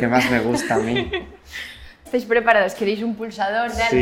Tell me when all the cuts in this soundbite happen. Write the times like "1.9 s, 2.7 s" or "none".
2.1 s